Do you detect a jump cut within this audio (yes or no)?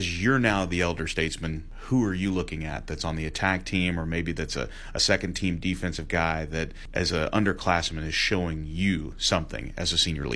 no